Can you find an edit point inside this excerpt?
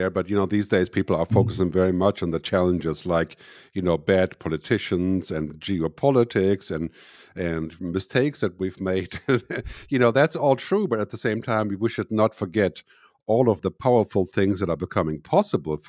no; 0 cuts

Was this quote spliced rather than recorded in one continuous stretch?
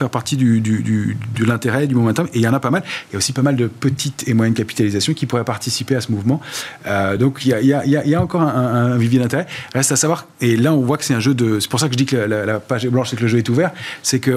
no; 0 cuts

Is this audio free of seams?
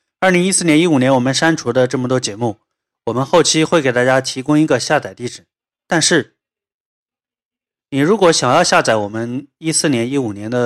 yes; 0 cuts

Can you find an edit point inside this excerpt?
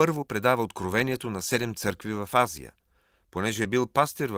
no; 0 cuts

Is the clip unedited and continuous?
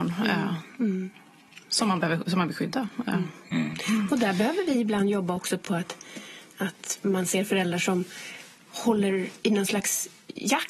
yes; 0 cuts

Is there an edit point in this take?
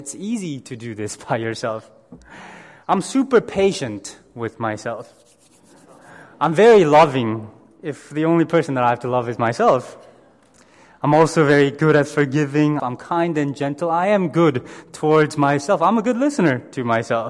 yes; 1 cut; at 12.8 s

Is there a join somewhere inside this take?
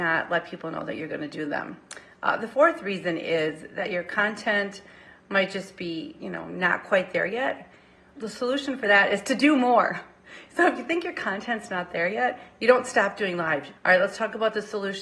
yes; 2 cuts; at 8.2 s, 13.8 s

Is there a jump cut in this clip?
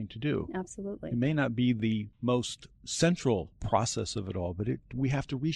no; 0 cuts

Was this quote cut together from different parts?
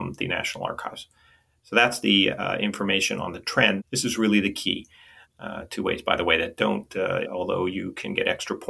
yes; 3 cuts; at 3.8 s, 5.2 s, 7.2 s

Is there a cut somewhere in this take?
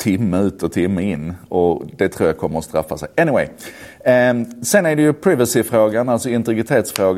no; 0 cuts

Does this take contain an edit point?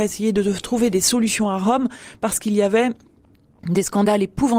no; 0 cuts

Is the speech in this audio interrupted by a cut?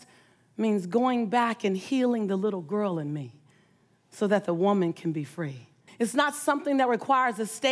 yes; 1 cut; at 5.9 s

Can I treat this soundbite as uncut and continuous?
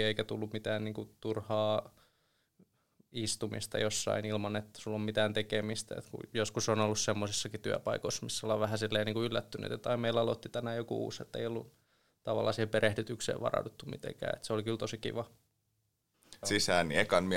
no; 1 cut; at 16.4 s

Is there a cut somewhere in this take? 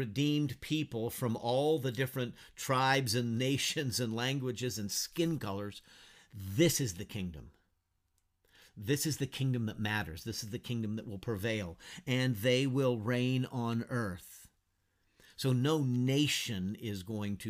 no; 0 cuts

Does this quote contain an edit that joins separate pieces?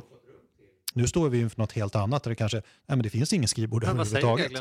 yes; 1 cut; at 0.9 s

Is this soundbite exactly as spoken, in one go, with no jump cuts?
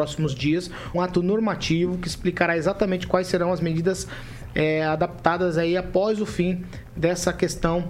no; 1 cut; at 0.9 s

